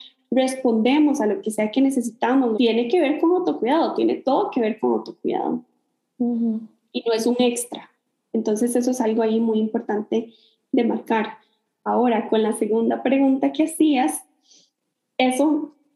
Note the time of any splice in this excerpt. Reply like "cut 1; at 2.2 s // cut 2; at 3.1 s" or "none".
cut 1; at 2.5 s